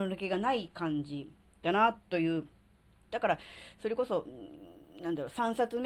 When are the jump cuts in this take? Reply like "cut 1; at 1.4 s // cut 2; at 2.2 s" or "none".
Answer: cut 1; at 3.1 s